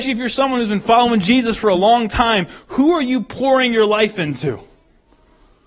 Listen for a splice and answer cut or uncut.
uncut